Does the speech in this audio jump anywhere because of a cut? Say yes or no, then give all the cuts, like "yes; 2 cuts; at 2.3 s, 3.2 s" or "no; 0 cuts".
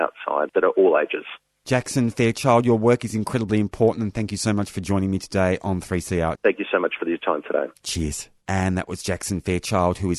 yes; 1 cut; at 6.3 s